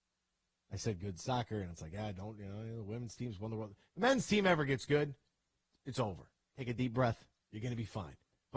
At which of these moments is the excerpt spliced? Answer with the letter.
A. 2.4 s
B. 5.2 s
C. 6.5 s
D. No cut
C